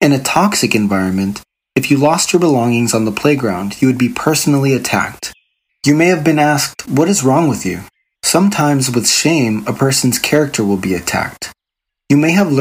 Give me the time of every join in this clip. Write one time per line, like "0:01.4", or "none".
0:05.7
0:08.1